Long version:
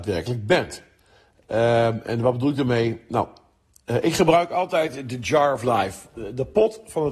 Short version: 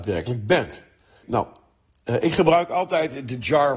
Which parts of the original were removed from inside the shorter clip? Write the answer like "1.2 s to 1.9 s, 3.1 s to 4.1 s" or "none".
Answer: 1.2 s to 3.0 s